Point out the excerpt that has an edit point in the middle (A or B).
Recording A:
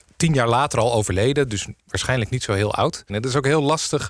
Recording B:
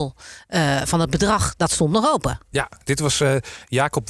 A